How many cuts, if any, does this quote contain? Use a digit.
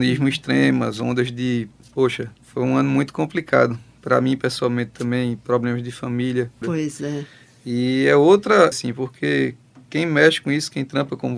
3